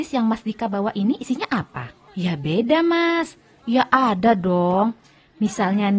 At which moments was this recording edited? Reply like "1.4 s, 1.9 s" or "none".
2.1 s, 3.5 s